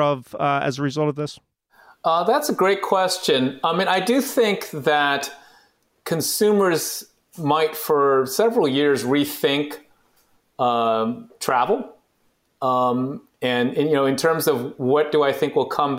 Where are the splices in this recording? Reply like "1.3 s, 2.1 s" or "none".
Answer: none